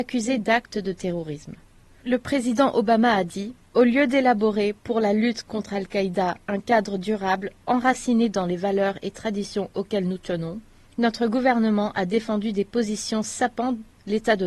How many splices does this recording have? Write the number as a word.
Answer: one